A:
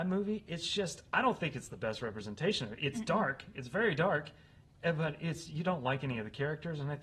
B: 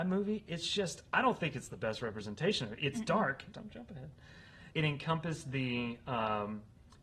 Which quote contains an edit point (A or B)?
B